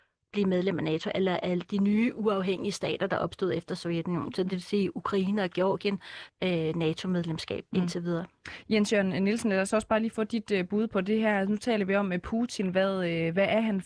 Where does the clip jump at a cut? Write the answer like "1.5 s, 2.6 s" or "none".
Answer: 6.3 s